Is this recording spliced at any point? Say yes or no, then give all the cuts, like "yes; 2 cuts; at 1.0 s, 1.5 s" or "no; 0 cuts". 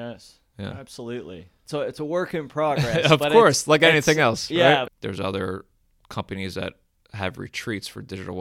yes; 1 cut; at 4.9 s